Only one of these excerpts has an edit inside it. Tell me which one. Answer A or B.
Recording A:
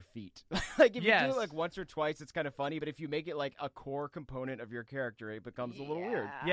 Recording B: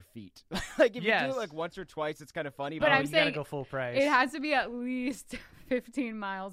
B